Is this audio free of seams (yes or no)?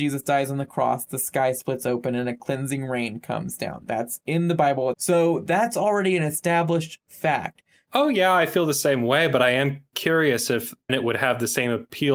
no